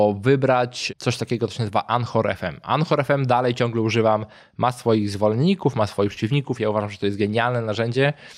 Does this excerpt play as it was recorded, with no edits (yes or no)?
yes